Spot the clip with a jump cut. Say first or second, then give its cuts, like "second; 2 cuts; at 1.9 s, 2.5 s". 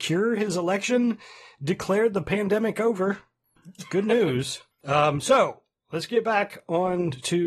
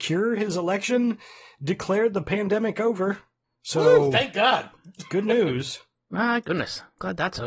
first; 2 cuts; at 3.6 s, 4.7 s